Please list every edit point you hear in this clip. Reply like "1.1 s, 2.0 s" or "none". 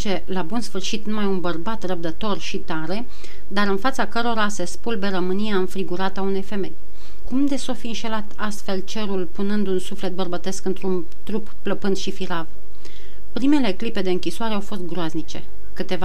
7.3 s